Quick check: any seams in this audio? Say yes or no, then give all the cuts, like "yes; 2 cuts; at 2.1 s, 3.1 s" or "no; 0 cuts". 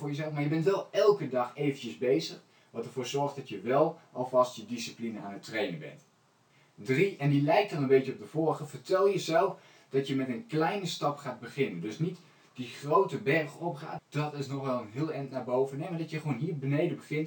yes; 1 cut; at 14.0 s